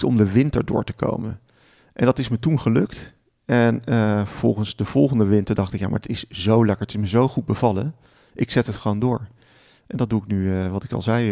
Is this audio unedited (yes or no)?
yes